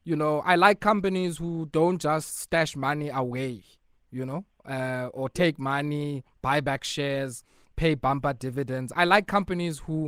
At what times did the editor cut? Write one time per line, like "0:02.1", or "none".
none